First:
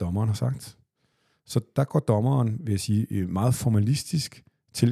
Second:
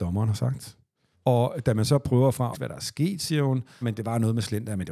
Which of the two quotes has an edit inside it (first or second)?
second